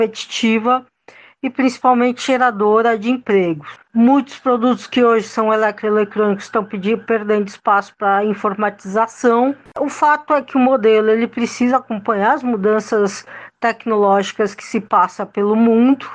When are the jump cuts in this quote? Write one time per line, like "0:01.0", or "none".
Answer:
0:03.8
0:09.7

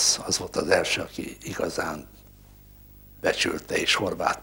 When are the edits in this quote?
none

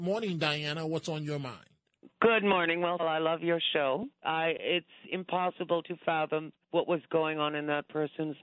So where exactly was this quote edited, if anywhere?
0:03.0
0:04.2
0:06.6

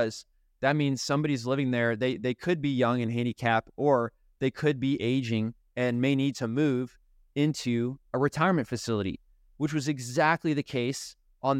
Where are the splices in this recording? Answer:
0:05.6

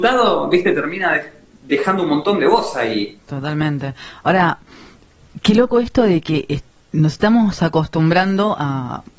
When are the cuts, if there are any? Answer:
0:03.2

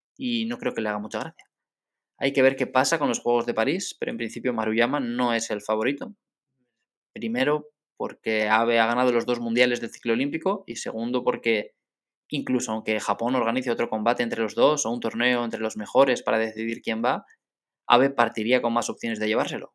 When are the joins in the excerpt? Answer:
none

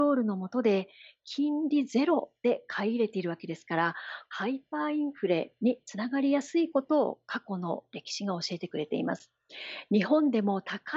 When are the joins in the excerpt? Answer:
none

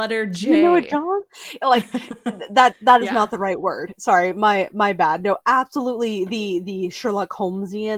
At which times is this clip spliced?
none

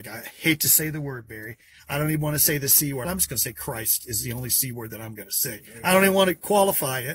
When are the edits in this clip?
0:03.0

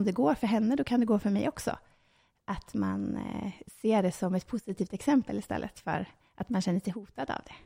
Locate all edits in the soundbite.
none

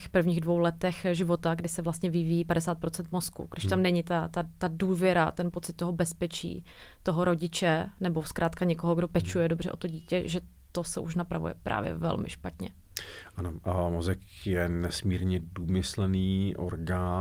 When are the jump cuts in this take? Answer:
none

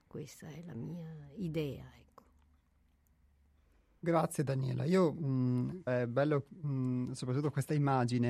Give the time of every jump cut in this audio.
0:05.9

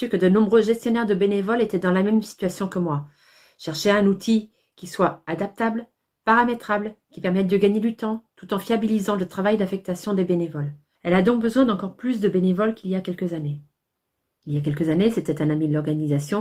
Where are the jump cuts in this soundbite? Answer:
0:11.0
0:14.4

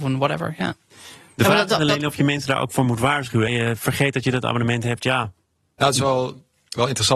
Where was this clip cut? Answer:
0:03.5

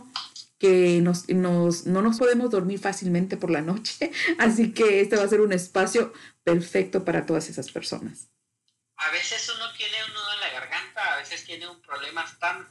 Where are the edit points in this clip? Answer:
0:02.2

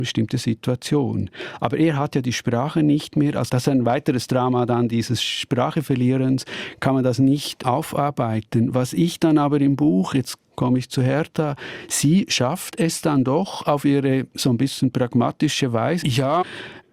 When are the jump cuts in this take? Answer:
0:10.4
0:16.0

